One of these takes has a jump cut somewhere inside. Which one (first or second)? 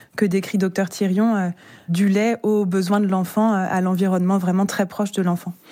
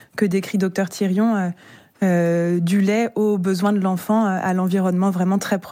first